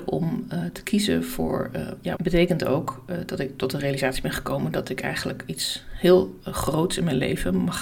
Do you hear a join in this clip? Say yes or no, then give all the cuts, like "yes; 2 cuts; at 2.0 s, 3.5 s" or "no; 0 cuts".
yes; 1 cut; at 2.2 s